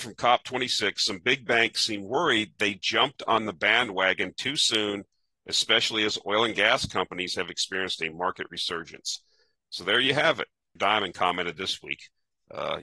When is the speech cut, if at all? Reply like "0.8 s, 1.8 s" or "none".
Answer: 10.8 s